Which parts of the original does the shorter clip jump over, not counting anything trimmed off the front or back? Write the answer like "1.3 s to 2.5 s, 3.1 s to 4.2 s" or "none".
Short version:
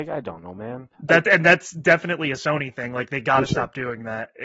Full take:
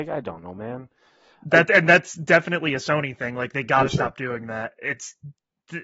0.9 s to 1.4 s